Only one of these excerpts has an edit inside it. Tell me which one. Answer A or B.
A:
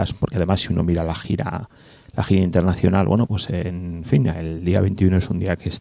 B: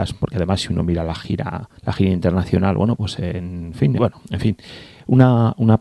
B